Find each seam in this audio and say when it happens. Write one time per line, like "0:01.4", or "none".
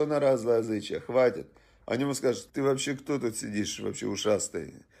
0:02.5